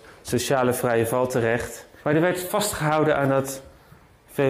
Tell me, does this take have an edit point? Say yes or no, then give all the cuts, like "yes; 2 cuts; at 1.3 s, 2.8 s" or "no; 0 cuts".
yes; 1 cut; at 2.0 s